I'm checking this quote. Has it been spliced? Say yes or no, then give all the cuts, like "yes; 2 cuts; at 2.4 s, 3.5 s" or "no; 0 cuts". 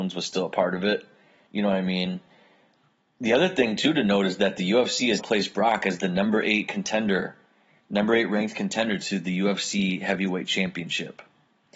yes; 2 cuts; at 1.5 s, 5.2 s